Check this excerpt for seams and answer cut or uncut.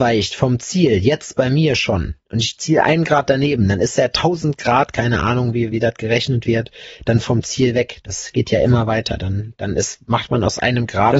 uncut